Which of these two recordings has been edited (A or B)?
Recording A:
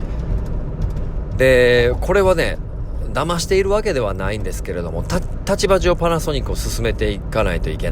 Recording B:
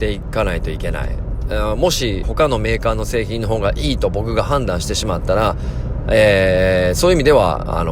B